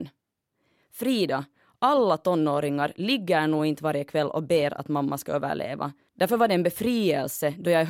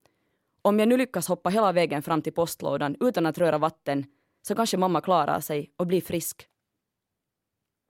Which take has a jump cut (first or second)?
first